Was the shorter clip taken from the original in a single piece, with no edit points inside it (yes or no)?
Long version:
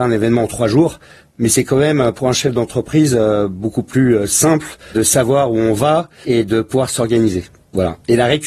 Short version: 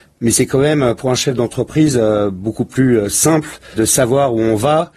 yes